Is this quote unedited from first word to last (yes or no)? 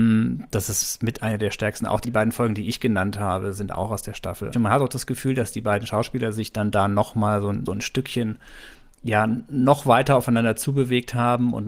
no